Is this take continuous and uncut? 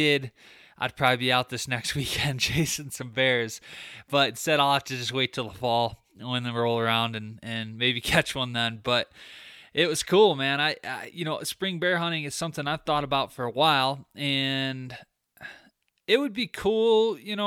yes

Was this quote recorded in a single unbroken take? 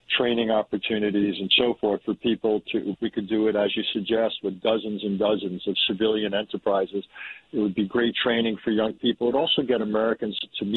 no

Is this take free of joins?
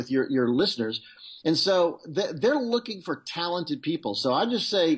no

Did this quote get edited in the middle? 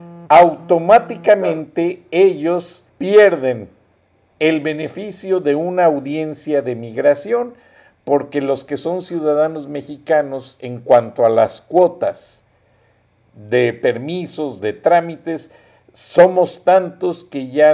yes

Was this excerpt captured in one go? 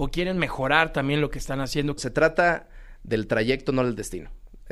no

